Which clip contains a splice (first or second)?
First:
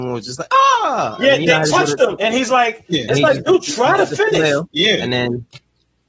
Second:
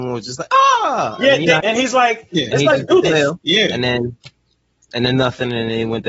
second